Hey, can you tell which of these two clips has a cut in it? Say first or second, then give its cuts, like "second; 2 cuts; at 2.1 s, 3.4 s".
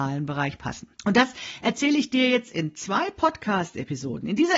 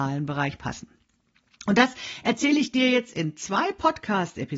first; 1 cut; at 0.9 s